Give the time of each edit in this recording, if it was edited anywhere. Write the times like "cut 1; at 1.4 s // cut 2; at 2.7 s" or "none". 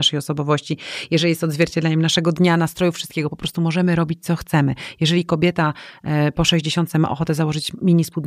none

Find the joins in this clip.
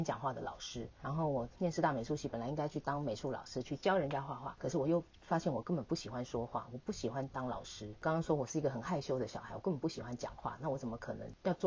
cut 1; at 1.0 s

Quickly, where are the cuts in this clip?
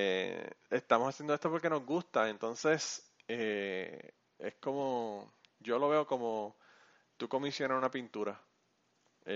none

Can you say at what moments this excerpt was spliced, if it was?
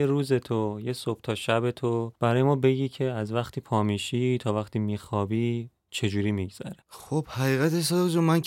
cut 1; at 6.8 s

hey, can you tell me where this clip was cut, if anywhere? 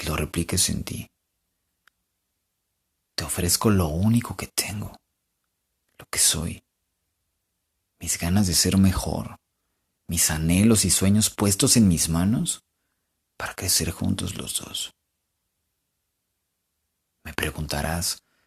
none

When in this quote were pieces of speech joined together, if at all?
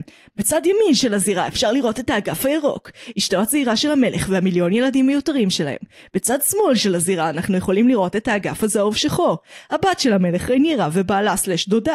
none

